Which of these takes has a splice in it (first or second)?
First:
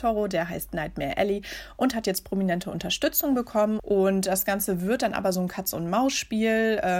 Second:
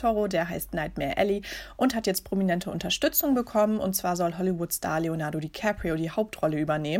first